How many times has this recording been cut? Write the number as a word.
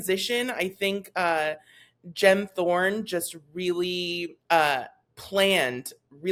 one